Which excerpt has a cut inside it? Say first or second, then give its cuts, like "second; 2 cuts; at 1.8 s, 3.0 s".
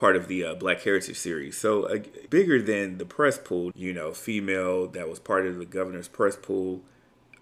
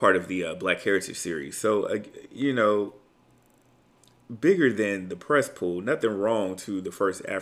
first; 2 cuts; at 2.3 s, 3.7 s